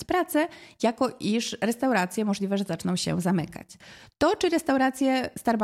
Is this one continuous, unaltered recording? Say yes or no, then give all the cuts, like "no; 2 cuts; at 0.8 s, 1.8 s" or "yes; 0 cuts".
yes; 0 cuts